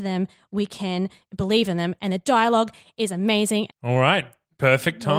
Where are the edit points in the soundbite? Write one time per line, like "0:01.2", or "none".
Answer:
0:03.7